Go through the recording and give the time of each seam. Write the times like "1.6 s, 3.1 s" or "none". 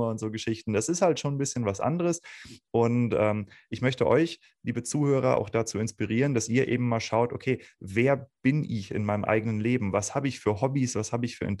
none